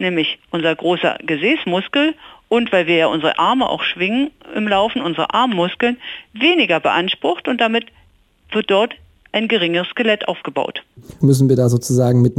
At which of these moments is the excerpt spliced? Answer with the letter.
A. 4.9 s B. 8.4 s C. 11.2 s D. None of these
C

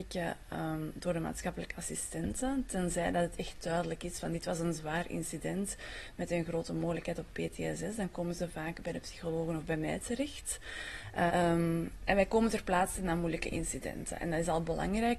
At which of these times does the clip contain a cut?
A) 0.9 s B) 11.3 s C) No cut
B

